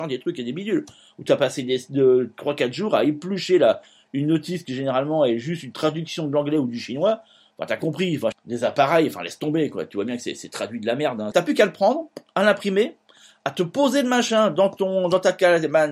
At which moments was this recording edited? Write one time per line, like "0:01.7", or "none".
0:08.3
0:11.3